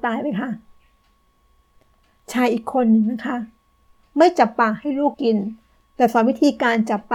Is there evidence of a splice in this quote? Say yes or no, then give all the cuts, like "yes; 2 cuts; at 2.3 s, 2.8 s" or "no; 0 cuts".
yes; 1 cut; at 5.1 s